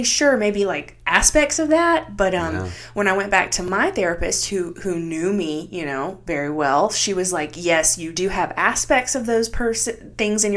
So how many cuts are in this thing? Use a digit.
0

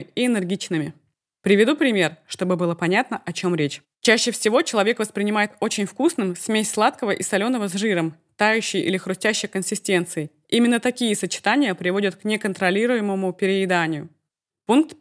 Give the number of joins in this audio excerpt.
2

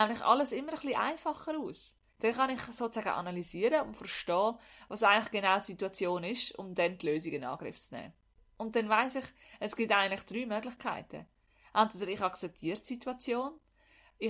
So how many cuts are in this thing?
0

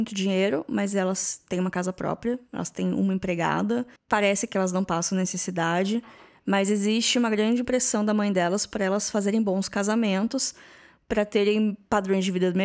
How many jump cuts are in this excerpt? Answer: 1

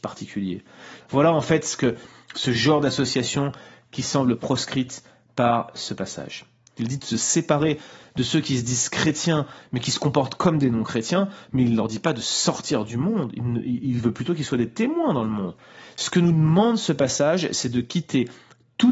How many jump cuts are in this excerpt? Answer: 2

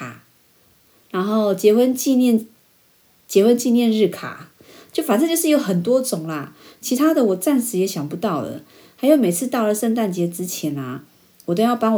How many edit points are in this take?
0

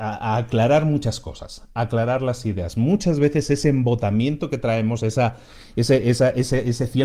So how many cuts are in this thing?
0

